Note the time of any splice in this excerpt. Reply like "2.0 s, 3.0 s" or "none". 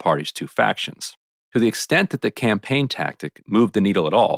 1.4 s